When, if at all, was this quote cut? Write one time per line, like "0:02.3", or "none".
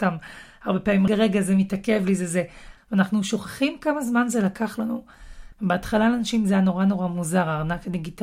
0:01.1
0:02.8
0:05.5